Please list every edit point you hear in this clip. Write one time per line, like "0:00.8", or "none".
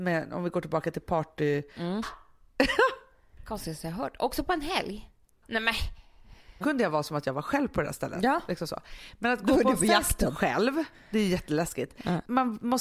0:02.0
0:05.4
0:06.6